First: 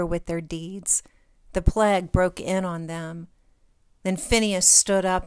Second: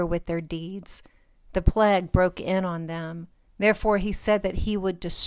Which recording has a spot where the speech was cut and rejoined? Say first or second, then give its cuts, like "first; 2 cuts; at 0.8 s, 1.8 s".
second; 1 cut; at 3.5 s